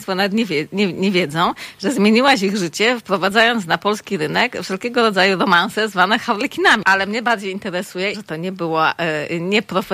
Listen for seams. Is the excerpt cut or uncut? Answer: cut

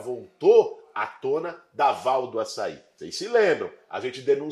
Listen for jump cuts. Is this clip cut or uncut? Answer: uncut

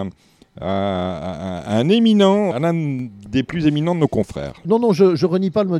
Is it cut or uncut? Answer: cut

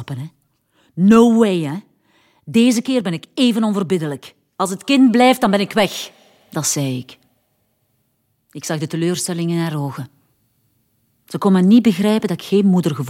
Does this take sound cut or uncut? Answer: uncut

